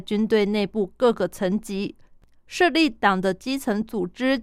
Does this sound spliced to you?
no; 0 cuts

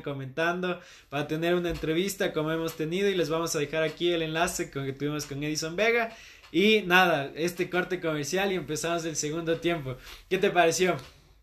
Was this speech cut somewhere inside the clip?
no; 0 cuts

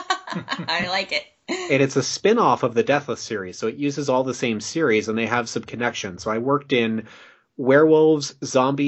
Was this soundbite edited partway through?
no; 0 cuts

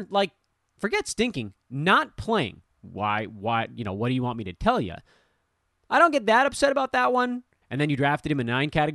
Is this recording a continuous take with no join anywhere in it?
no; 2 cuts; at 2.7 s, 7.6 s

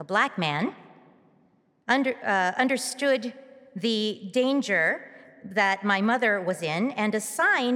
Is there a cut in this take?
no; 0 cuts

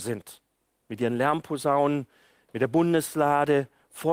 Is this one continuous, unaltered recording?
yes; 0 cuts

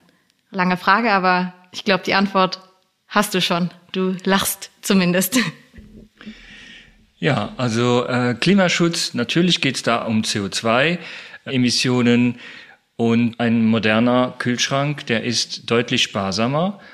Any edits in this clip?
no; 0 cuts

